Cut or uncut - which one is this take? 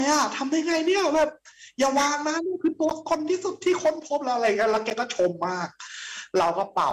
uncut